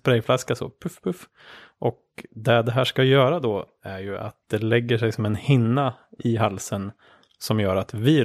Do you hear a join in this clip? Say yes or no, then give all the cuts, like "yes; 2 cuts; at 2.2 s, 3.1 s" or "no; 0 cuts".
no; 0 cuts